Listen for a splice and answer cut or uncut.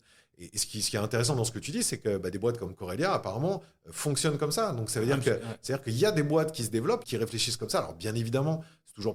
cut